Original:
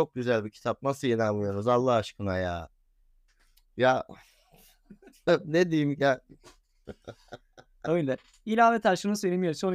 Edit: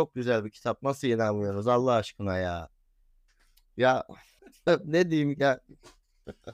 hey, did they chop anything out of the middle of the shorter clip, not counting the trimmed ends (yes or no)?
yes